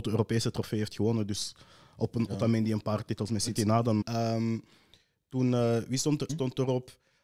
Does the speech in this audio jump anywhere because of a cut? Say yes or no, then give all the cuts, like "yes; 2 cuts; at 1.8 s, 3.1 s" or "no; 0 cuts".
yes; 2 cuts; at 4.0 s, 6.3 s